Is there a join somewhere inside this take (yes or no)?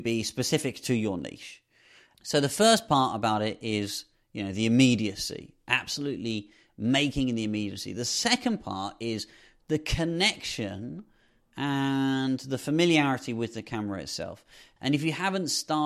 yes